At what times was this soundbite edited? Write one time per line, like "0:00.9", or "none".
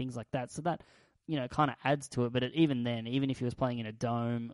none